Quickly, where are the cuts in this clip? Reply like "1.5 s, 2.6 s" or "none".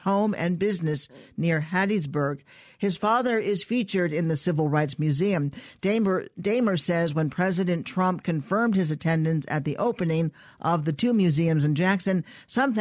none